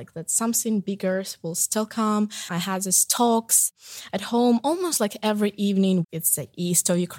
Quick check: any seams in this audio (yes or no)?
yes